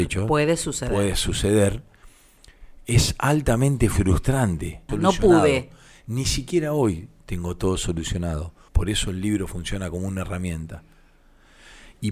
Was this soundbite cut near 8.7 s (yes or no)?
yes